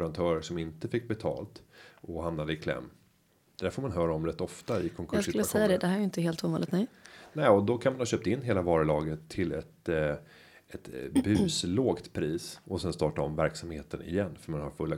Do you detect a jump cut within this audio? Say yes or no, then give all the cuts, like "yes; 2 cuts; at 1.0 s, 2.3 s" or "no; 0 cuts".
yes; 1 cut; at 3.6 s